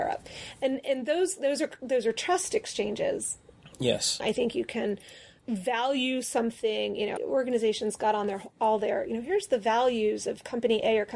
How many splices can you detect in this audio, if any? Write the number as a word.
two